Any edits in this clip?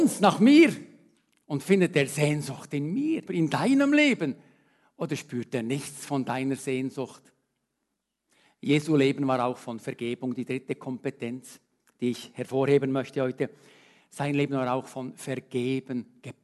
yes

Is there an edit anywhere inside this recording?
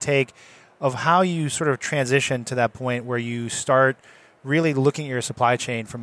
no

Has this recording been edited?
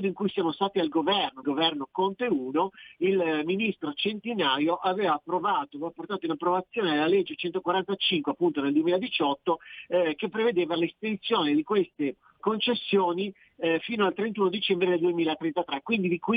yes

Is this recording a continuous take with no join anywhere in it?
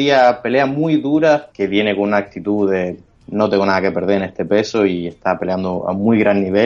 no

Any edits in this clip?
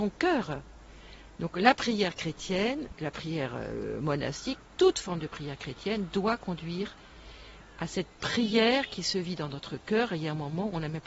no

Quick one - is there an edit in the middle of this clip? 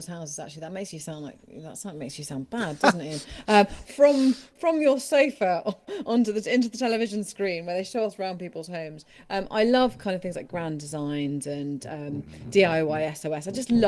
yes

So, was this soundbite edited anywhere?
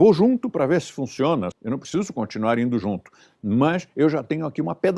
yes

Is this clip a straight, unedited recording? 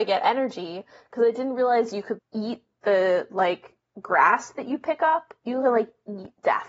no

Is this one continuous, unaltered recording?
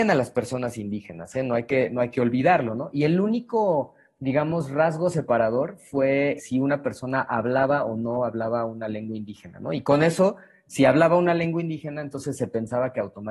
no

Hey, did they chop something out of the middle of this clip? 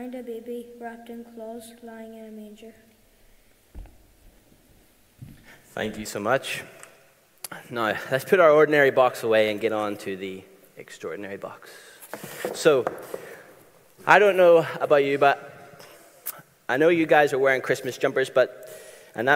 no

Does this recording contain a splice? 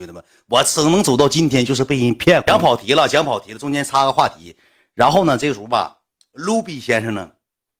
no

